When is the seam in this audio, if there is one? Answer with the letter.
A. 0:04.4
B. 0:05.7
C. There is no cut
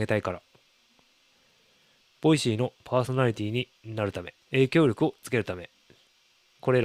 A